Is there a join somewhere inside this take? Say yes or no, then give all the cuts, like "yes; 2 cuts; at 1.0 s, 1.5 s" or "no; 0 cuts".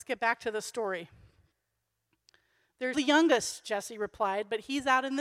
yes; 1 cut; at 2.9 s